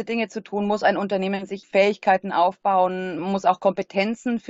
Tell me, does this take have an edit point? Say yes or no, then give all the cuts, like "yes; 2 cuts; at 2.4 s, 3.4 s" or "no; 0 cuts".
yes; 2 cuts; at 1.6 s, 3.2 s